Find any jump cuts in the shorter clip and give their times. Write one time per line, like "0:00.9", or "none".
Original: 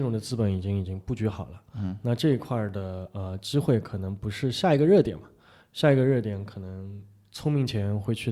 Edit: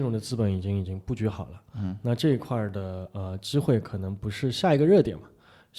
none